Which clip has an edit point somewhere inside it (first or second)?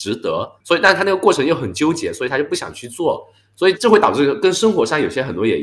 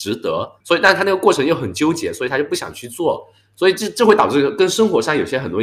first